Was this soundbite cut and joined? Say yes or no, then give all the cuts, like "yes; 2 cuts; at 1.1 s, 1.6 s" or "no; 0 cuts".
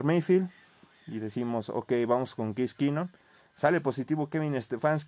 no; 0 cuts